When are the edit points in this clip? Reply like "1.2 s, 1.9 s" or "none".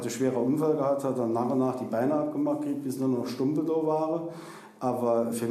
none